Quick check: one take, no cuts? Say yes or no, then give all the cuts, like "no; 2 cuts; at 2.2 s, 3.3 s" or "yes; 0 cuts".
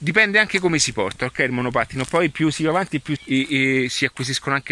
no; 1 cut; at 3.2 s